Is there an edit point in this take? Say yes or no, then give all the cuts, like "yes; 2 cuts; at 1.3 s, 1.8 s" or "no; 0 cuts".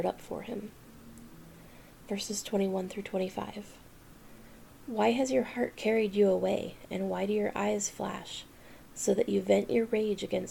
yes; 1 cut; at 4.7 s